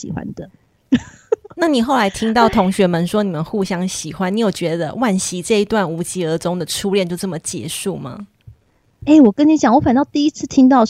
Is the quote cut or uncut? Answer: uncut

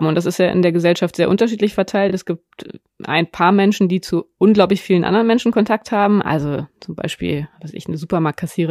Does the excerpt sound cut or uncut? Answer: uncut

